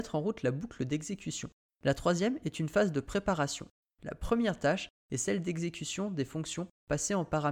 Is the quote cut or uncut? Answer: cut